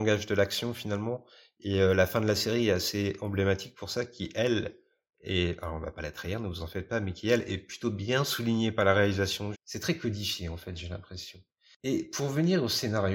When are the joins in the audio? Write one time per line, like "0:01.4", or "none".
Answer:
0:09.5

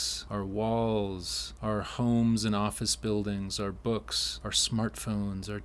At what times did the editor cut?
none

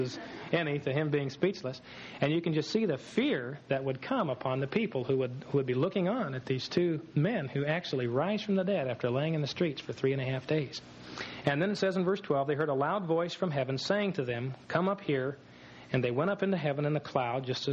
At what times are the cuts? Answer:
0:11.4

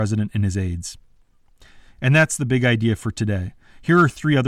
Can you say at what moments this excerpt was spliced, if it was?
none

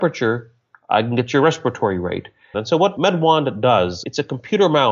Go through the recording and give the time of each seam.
0:02.5

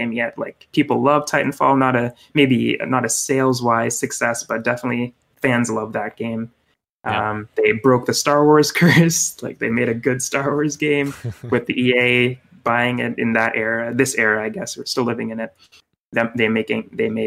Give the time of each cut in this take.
none

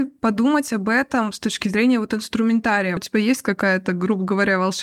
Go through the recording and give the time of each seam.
0:03.0

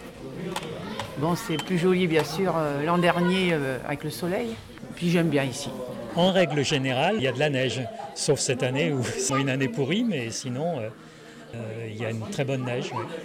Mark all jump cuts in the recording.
0:07.2
0:09.3
0:11.5

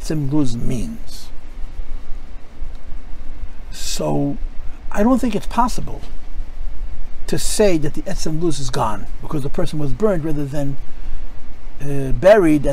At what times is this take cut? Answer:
none

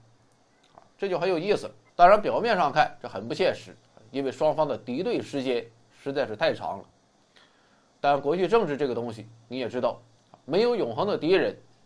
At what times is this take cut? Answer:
0:01.9

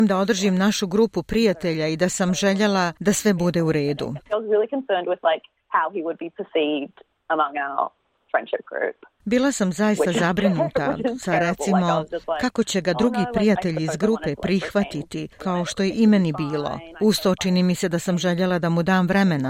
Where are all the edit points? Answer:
0:04.2
0:15.4
0:16.9

